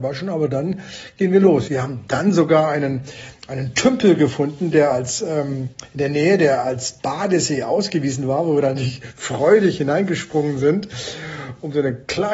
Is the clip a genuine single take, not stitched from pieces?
no; 1 cut; at 1.7 s

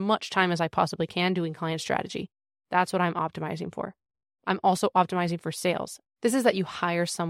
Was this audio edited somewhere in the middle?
yes; 1 cut; at 6.0 s

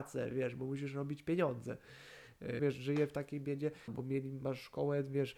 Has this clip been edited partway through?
yes; 2 cuts; at 2.6 s, 3.9 s

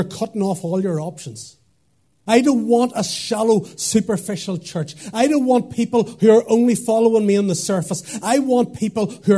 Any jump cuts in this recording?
yes; 1 cut; at 2.3 s

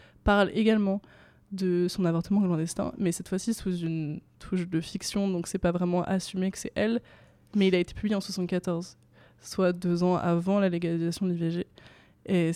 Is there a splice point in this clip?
no; 0 cuts

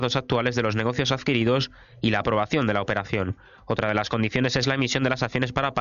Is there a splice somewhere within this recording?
no; 0 cuts

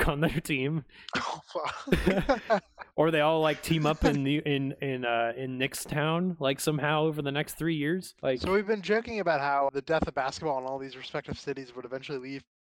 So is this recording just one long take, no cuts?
no; 2 cuts; at 8.2 s, 9.7 s

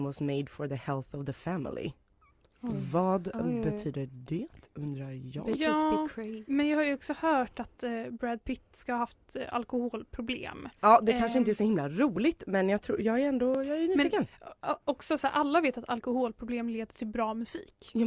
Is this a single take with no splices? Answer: yes; 0 cuts

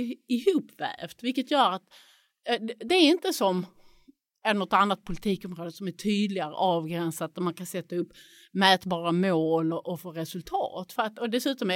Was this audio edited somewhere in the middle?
no; 0 cuts

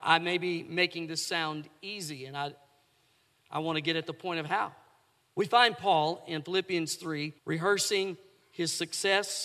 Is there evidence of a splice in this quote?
yes; 2 cuts; at 5.2 s, 7.4 s

